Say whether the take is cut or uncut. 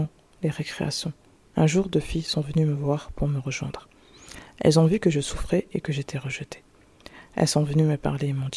uncut